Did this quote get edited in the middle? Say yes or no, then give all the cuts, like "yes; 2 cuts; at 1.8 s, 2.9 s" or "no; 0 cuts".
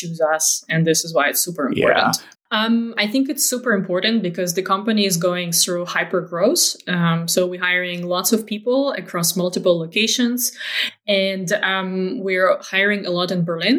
yes; 1 cut; at 2.3 s